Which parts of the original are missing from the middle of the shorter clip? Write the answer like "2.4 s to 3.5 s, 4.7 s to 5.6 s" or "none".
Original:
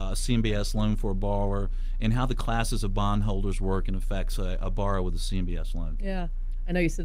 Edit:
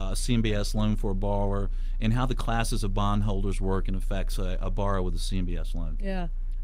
none